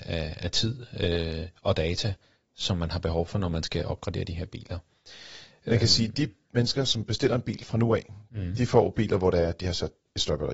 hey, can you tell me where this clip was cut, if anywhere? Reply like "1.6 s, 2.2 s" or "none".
none